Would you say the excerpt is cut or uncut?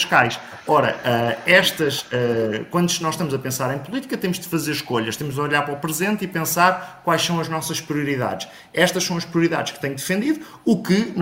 uncut